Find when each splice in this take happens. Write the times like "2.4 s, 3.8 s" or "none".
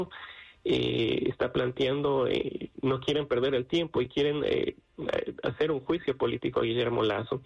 none